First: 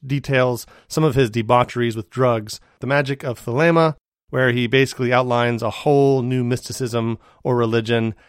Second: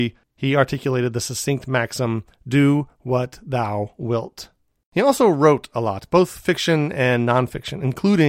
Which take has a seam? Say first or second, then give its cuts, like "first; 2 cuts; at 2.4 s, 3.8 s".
second; 1 cut; at 4.8 s